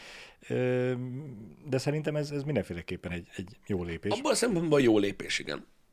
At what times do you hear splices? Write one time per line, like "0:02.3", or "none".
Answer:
none